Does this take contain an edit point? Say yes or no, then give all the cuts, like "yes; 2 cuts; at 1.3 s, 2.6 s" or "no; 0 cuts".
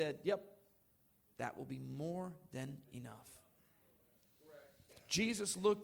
yes; 1 cut; at 1.3 s